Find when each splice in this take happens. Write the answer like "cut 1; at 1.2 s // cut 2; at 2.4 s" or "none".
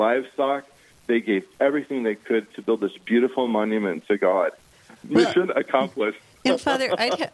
cut 1; at 4.7 s